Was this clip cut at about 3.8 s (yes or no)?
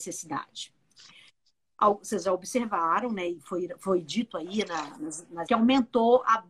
no